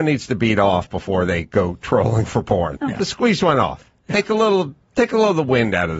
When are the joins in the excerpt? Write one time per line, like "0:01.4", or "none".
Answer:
0:02.8